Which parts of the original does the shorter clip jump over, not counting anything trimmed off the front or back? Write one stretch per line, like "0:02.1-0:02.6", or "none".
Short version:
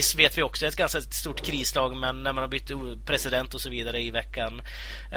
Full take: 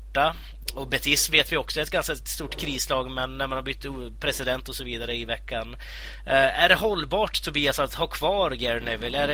none